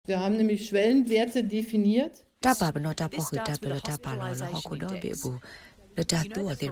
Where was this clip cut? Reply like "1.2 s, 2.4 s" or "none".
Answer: 2.4 s